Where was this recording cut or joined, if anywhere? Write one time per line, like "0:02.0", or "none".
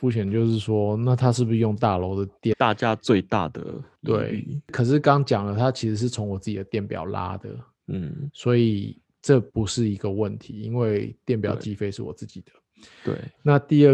0:02.5
0:09.5